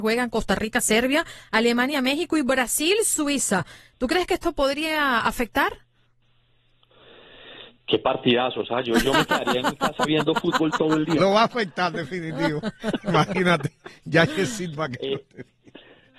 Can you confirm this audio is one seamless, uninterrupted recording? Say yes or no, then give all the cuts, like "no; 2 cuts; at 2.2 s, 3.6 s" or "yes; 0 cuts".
yes; 0 cuts